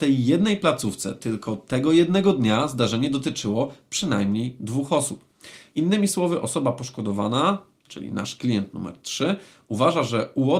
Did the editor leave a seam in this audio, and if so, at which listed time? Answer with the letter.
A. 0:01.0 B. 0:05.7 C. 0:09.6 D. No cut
B